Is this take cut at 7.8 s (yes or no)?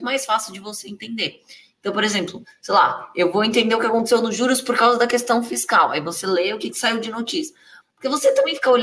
yes